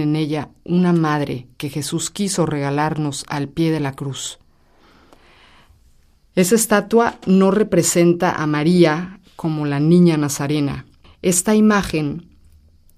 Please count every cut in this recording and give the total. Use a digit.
1